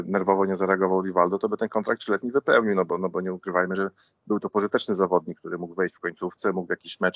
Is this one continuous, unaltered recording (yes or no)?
yes